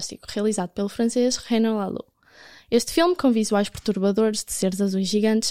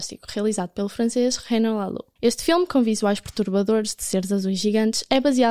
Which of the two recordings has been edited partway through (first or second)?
second